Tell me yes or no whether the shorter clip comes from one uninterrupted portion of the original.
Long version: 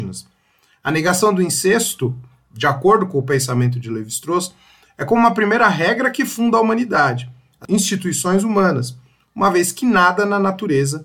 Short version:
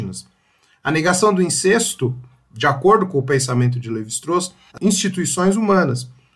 no